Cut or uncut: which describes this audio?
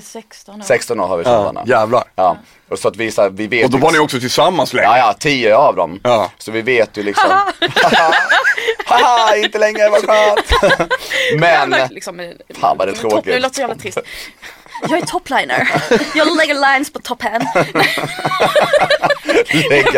cut